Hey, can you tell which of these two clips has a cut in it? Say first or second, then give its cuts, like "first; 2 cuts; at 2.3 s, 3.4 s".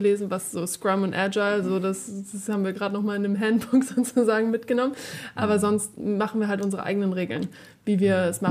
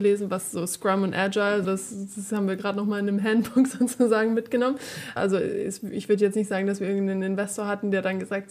second; 2 cuts; at 1.6 s, 5.2 s